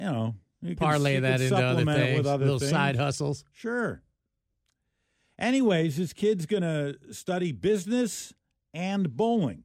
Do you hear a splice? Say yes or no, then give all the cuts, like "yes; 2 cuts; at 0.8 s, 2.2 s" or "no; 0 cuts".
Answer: no; 0 cuts